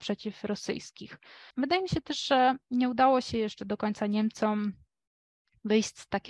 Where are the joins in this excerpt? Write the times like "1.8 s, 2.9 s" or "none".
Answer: 1.5 s

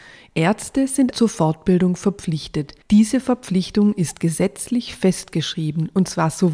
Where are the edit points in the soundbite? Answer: 1.1 s, 2.8 s

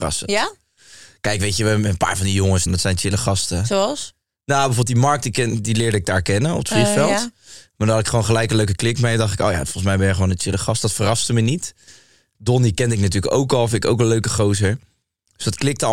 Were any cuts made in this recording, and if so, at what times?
2.7 s

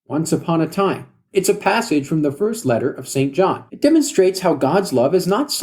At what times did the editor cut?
1.3 s, 3.7 s

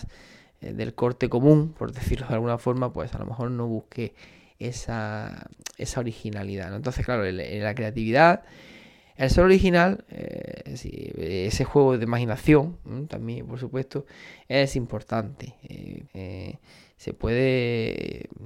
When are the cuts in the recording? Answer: 16.1 s

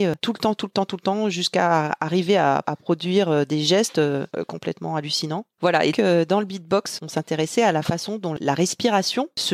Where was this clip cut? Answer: 5.9 s

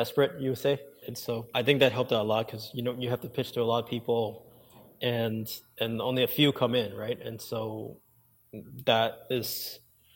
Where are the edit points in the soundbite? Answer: 1.0 s

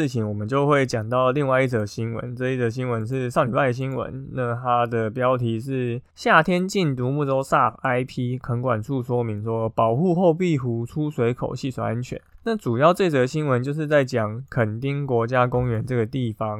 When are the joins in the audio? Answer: none

